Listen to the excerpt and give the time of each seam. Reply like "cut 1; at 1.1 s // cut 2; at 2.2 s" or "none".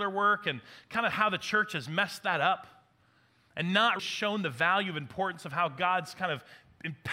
cut 1; at 4.0 s